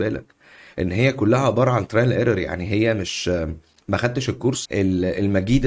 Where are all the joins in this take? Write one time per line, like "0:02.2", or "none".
0:04.7